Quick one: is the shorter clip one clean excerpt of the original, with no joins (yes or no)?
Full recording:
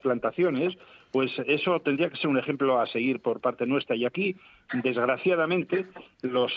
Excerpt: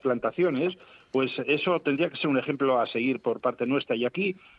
yes